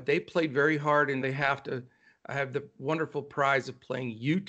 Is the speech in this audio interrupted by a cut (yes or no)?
yes